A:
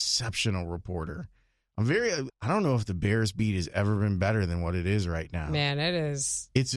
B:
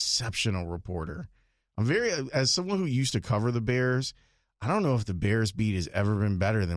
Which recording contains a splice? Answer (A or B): A